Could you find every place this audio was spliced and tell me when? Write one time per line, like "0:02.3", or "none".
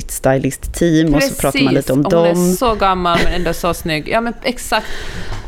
none